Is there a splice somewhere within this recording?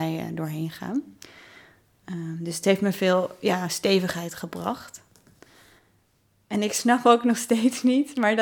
no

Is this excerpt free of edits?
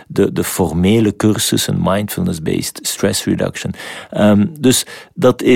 yes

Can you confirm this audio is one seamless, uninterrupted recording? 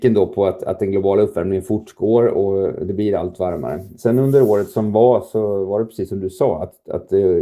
yes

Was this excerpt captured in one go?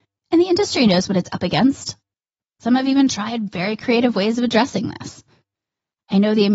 yes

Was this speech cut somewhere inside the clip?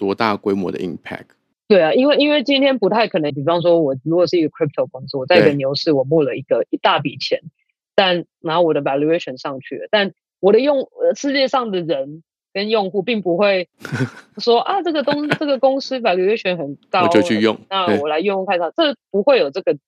yes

